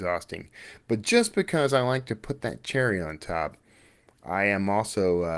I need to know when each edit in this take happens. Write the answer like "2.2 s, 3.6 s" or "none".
none